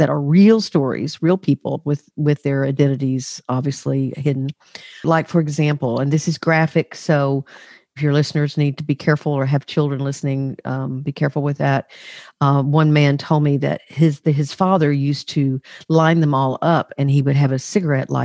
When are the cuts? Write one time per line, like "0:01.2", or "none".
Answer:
0:05.0

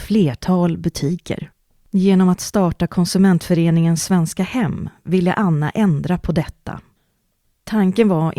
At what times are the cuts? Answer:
0:01.7

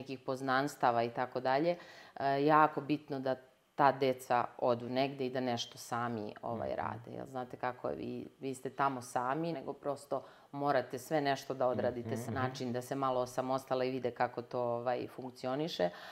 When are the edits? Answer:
0:09.5
0:12.3

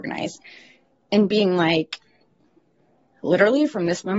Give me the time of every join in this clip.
none

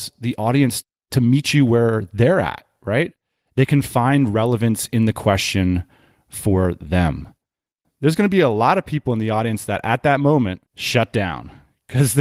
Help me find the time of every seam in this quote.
0:07.8
0:10.7

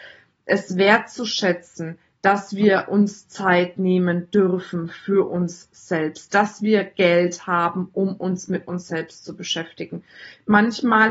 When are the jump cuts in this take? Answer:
none

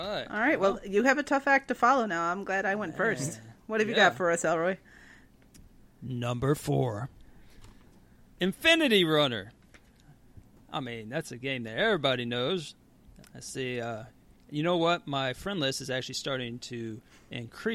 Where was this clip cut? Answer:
0:13.2

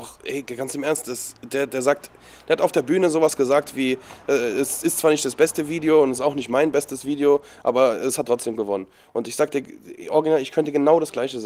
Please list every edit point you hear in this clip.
none

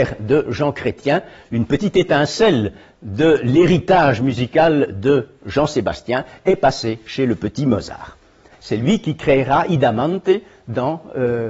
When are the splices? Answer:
0:08.5

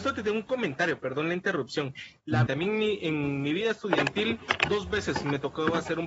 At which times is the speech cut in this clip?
0:02.5

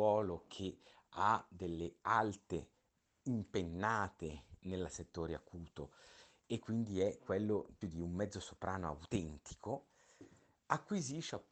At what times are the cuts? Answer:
0:07.8

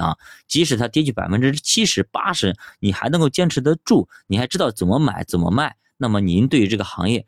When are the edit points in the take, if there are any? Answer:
none

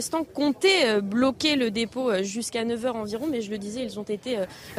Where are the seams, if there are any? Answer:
none

